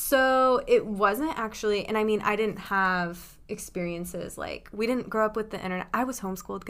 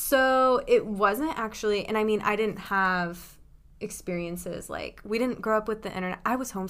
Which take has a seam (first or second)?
first